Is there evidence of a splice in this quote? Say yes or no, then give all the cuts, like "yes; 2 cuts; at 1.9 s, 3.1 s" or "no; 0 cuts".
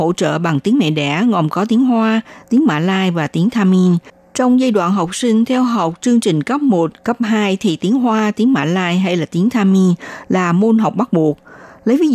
no; 0 cuts